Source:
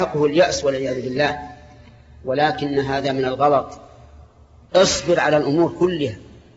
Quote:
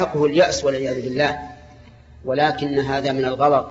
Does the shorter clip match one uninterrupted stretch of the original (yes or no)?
yes